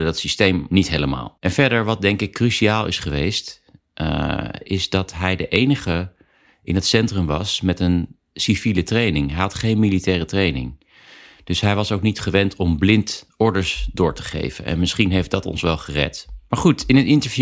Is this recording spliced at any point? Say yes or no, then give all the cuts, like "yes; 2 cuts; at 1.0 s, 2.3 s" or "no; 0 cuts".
no; 0 cuts